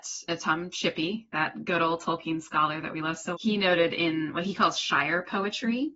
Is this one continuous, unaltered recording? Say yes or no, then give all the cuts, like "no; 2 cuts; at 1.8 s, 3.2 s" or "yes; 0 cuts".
no; 1 cut; at 3.3 s